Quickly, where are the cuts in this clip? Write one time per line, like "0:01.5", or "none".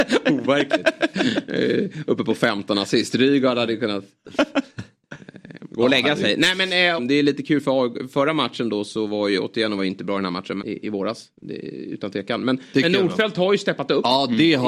0:07.0
0:10.6

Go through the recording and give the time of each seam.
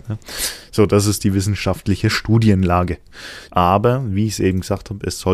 0:03.5

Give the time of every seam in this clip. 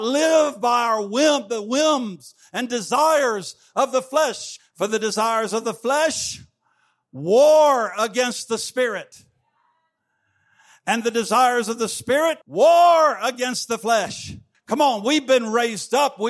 0:04.6
0:12.4
0:14.5

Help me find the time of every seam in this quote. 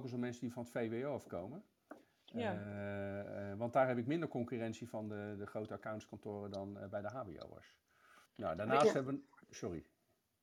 0:08.3

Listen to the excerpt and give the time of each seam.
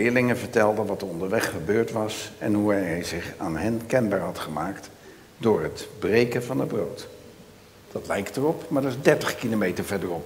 0:07.9

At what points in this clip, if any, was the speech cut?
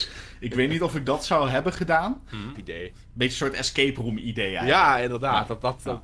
0:02.5

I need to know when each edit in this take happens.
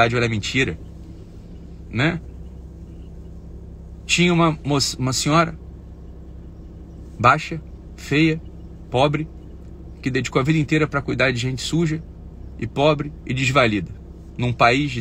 none

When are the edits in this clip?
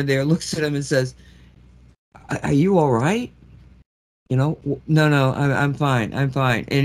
0:04.8

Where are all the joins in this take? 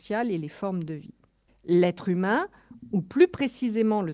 0:01.5

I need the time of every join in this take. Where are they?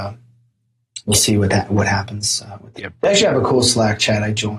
0:02.8

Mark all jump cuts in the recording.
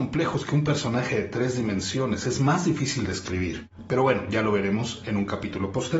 none

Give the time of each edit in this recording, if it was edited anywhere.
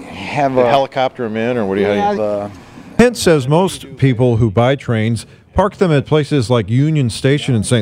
0:02.1

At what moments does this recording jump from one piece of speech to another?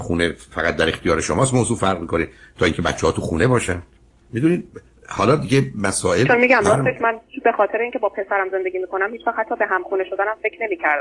none

